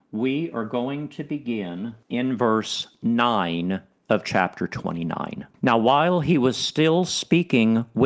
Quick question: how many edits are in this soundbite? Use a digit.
2